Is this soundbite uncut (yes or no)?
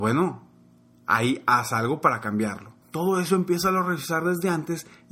no